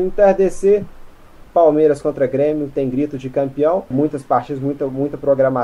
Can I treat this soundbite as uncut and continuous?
no; 2 cuts; at 1.4 s, 3.9 s

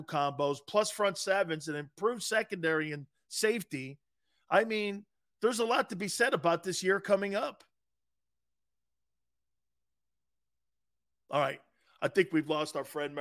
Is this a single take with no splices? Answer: yes; 0 cuts

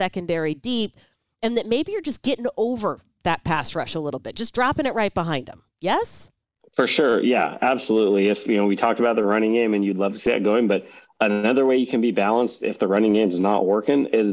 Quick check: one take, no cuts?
yes; 0 cuts

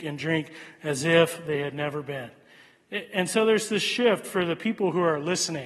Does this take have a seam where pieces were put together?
no; 0 cuts

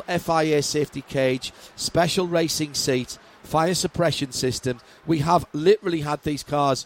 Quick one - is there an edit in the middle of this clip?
no; 0 cuts

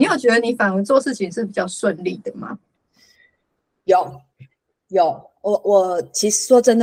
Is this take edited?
no; 0 cuts

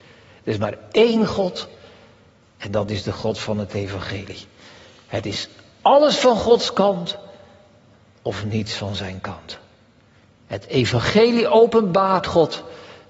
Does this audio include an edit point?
no; 0 cuts

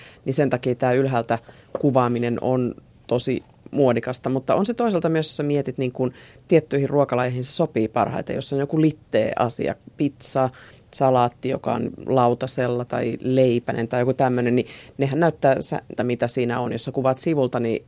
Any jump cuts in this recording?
yes; 2 cuts; at 12.9 s, 16.0 s

